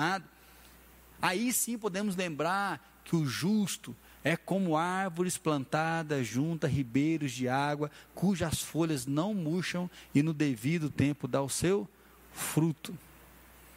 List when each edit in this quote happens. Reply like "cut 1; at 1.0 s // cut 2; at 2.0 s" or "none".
none